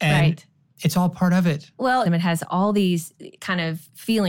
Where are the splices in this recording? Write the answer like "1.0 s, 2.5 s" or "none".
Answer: 2.1 s